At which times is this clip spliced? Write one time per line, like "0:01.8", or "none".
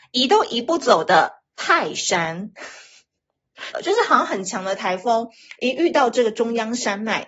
0:03.7